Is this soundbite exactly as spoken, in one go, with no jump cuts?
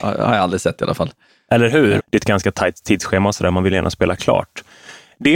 no; 1 cut; at 2.0 s

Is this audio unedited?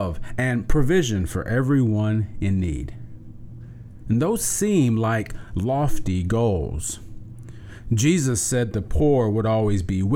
yes; 0 cuts

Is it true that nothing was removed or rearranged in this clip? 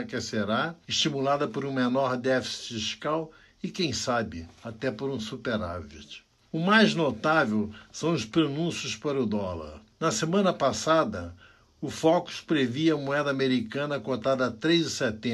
yes; 0 cuts

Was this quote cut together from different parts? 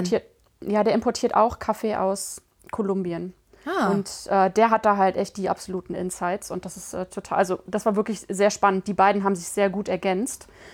no; 0 cuts

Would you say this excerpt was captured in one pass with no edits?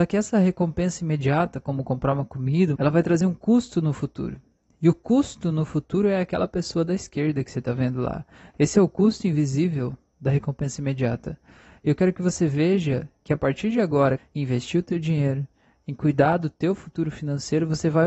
no; 2 cuts; at 2.8 s, 14.2 s

